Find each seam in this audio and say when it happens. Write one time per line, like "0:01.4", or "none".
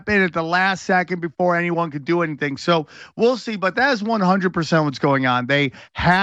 none